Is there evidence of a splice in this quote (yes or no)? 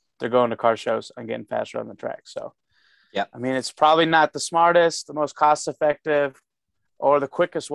no